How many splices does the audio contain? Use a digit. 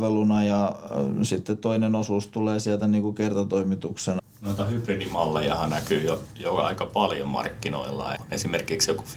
2